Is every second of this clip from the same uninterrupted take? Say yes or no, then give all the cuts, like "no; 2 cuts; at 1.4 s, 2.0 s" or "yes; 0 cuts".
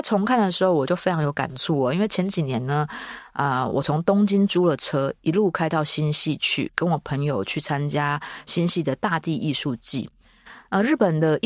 yes; 0 cuts